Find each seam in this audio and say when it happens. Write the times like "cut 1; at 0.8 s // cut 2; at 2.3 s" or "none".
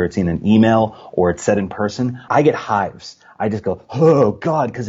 cut 1; at 2.3 s